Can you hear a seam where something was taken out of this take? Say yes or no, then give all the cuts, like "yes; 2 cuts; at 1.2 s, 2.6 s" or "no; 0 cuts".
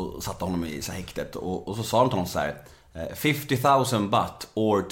no; 0 cuts